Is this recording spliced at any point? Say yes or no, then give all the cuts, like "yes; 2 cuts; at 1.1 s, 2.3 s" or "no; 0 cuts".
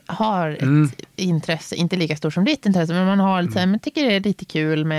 no; 0 cuts